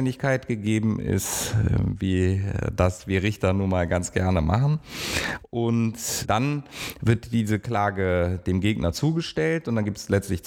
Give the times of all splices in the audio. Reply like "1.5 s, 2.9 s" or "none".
6.2 s